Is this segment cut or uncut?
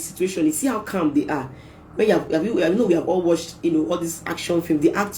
uncut